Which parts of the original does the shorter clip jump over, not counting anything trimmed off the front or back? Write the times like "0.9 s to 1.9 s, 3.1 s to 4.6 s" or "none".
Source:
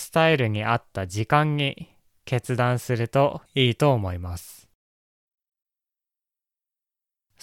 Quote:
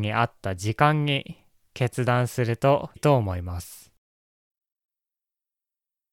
3.5 s to 3.7 s